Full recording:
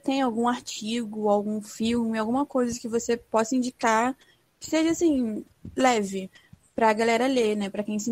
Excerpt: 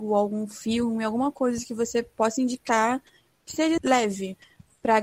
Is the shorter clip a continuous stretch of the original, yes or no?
no